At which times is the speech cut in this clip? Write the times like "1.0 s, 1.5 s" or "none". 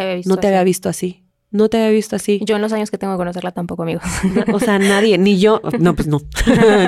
none